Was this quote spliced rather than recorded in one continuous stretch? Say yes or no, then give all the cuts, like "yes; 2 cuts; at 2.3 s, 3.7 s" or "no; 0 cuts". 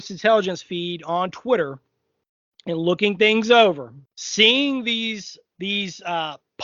yes; 2 cuts; at 4.1 s, 5.5 s